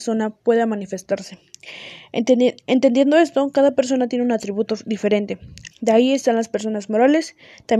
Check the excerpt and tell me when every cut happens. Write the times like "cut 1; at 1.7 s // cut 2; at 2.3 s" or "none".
cut 1; at 5.7 s